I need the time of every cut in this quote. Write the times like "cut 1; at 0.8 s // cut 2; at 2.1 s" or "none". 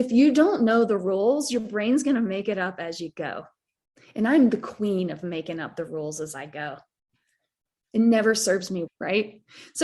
cut 1; at 8.9 s